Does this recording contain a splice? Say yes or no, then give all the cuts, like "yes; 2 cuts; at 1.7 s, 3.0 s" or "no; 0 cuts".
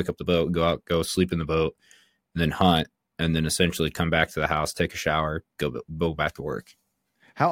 yes; 1 cut; at 5.5 s